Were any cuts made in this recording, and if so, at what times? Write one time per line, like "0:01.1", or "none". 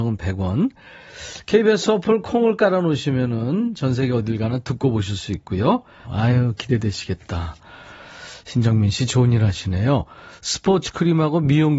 0:06.0